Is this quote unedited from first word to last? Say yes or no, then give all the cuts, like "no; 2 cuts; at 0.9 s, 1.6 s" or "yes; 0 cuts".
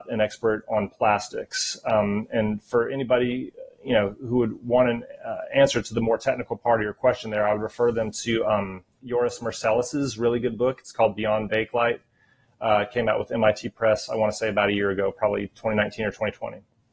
yes; 0 cuts